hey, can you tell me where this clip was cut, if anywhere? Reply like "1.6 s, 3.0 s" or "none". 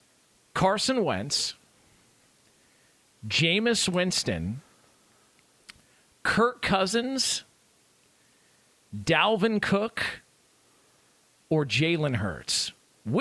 none

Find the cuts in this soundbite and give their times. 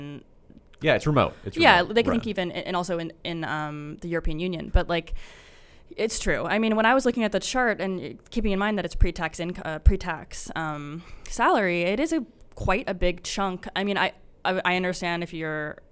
2.1 s

